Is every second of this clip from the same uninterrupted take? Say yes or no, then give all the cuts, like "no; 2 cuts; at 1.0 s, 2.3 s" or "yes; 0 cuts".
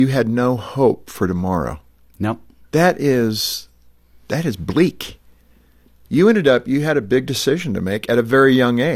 yes; 0 cuts